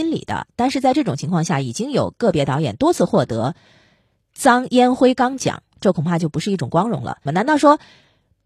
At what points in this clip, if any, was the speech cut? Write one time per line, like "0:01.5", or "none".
0:07.3